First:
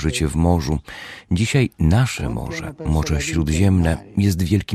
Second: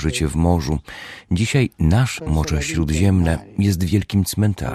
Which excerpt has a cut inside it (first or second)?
second